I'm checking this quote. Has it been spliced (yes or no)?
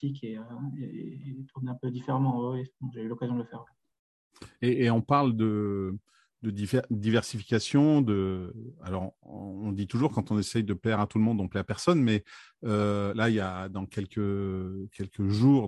no